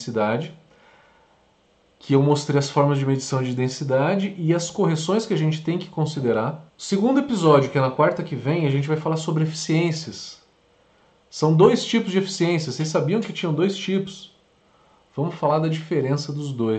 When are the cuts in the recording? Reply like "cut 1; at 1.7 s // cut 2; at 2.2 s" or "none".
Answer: cut 1; at 6.7 s